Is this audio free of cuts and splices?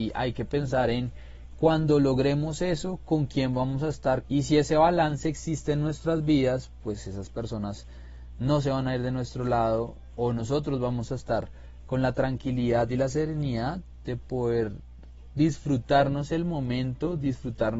no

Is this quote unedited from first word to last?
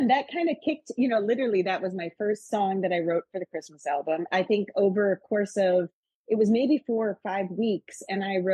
no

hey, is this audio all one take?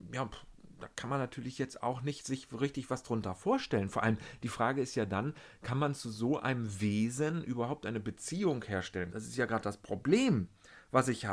no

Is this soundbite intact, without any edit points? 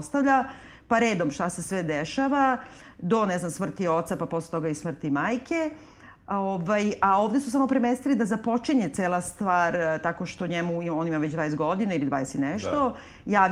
yes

